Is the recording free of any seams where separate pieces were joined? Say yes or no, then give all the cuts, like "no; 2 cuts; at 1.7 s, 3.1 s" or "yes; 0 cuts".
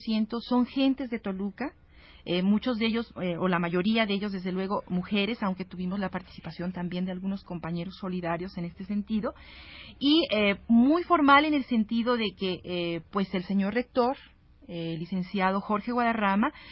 yes; 0 cuts